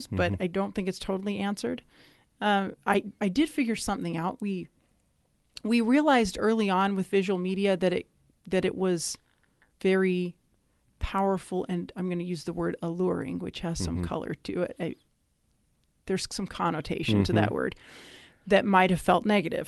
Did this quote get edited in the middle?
yes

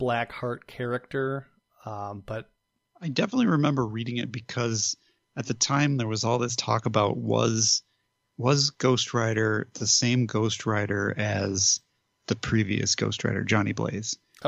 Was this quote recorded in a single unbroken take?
yes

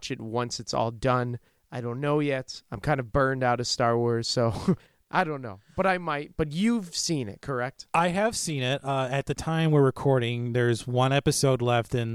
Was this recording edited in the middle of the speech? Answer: no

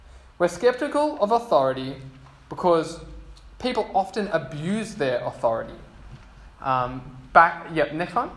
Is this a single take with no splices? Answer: no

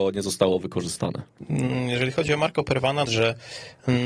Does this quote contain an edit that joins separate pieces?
yes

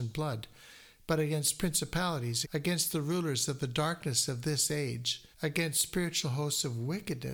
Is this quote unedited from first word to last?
no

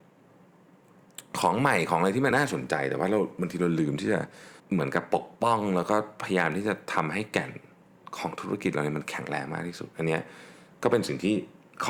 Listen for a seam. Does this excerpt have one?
yes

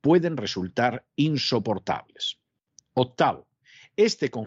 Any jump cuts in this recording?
no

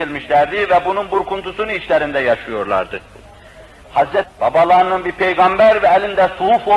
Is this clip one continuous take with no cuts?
no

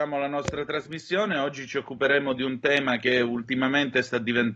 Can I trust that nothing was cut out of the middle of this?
yes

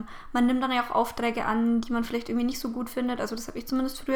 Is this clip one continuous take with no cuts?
yes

